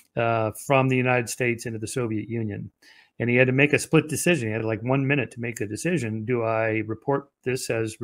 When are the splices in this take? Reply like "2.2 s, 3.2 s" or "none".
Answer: none